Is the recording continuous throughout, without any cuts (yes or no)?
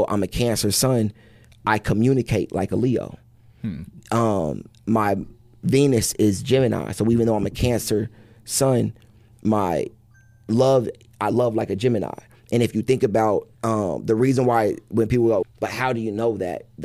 no